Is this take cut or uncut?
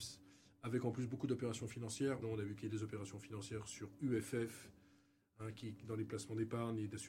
cut